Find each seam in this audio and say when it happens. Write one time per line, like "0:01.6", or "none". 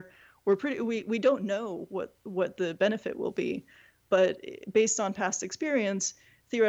none

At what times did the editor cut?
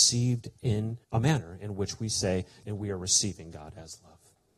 0:01.0
0:02.6

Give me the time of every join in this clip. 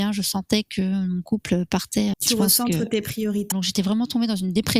0:02.1
0:03.5

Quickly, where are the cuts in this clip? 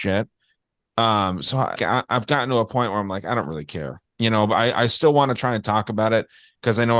0:01.8

